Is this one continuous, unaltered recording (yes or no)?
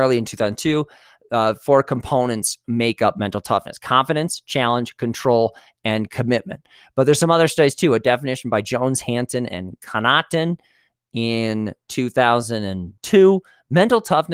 no